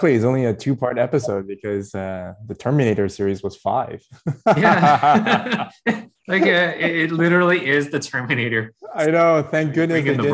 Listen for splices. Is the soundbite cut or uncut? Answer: uncut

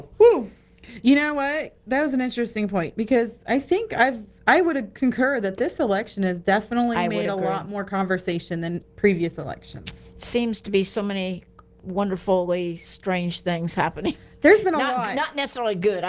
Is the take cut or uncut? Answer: uncut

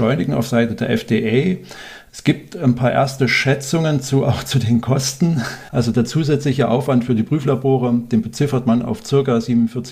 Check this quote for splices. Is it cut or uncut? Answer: uncut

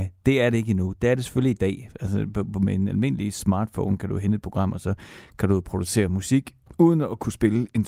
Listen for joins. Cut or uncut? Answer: uncut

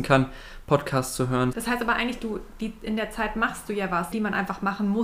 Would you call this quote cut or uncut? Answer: cut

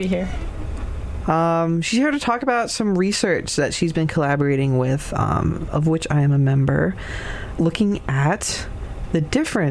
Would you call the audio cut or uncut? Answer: cut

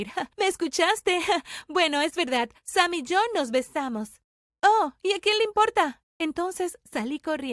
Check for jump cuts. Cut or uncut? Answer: cut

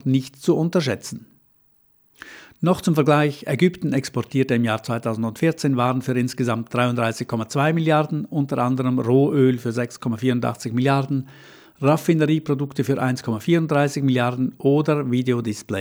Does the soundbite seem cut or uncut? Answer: uncut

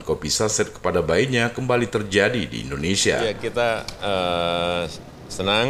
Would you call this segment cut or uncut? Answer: uncut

